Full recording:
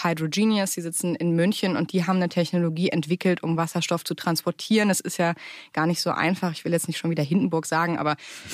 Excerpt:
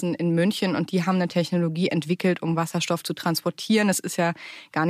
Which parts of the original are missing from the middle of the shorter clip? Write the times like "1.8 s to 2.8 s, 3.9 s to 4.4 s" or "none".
none